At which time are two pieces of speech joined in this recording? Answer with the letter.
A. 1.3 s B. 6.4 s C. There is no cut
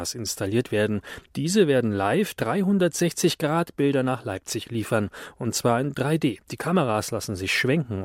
C